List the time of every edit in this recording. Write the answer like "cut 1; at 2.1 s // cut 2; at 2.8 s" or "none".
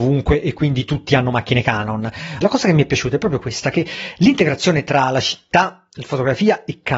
cut 1; at 2.4 s